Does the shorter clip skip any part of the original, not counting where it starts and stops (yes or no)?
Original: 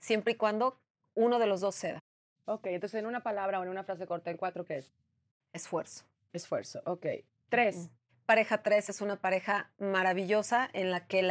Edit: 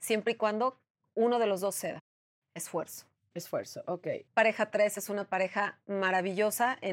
yes